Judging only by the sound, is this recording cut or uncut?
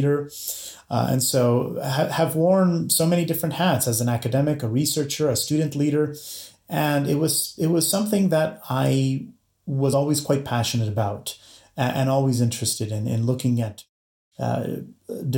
uncut